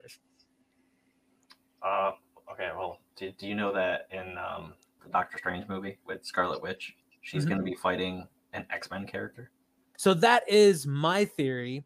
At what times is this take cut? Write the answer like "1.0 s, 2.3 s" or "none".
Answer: 5.0 s, 9.9 s